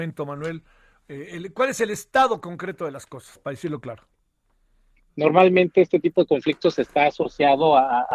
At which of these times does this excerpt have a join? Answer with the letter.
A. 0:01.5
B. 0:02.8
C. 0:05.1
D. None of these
C